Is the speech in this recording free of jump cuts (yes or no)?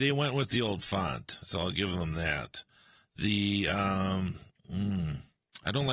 yes